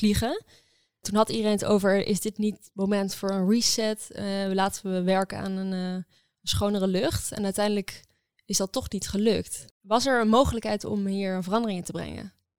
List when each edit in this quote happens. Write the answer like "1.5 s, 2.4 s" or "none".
none